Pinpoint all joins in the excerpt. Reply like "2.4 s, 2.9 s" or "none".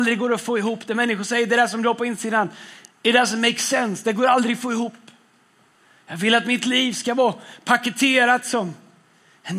none